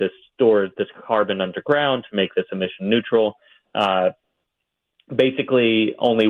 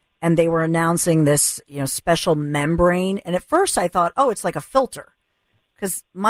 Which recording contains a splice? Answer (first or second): first